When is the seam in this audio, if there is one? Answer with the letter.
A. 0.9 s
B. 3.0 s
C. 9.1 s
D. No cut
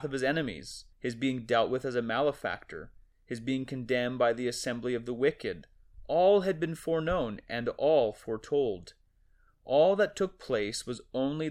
A